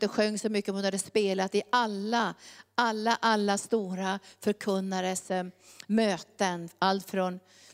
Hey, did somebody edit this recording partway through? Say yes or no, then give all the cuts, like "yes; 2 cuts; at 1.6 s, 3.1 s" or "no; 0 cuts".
no; 0 cuts